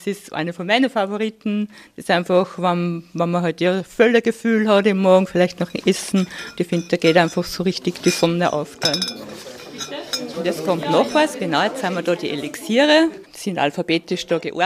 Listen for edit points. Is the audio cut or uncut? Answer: cut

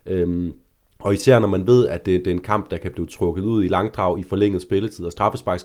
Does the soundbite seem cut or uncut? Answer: uncut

